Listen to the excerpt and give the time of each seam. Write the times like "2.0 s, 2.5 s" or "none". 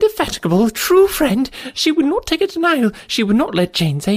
none